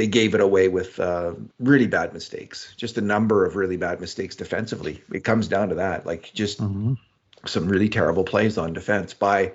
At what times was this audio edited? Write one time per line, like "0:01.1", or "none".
0:01.5